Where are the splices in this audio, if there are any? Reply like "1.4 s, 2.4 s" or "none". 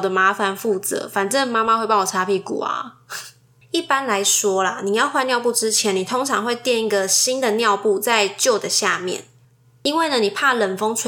3.6 s, 9.6 s